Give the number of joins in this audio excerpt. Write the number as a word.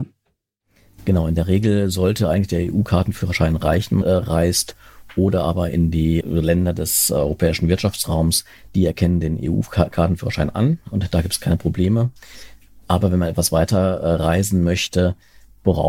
two